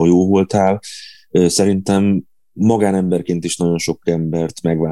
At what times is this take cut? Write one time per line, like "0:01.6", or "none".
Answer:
none